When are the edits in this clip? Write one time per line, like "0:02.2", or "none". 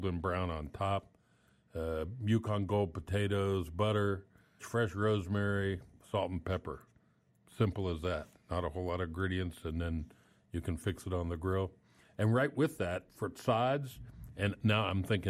0:04.6